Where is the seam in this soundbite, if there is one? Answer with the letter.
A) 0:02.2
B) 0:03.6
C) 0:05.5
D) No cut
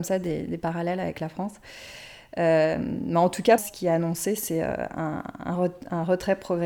B